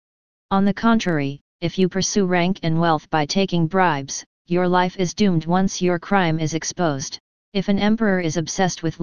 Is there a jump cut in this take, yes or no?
yes